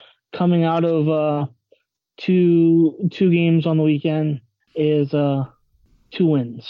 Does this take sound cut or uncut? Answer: uncut